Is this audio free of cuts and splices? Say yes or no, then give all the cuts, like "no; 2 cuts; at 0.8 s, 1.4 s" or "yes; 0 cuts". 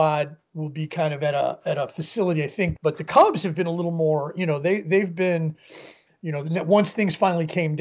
no; 2 cuts; at 2.8 s, 6.1 s